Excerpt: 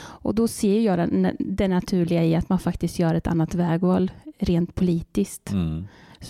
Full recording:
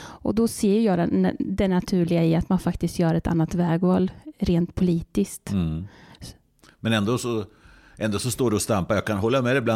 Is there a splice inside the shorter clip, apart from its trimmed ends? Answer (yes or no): no